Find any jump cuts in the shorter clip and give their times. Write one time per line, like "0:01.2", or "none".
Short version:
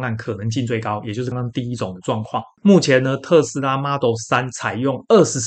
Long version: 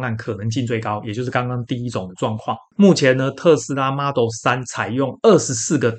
0:01.3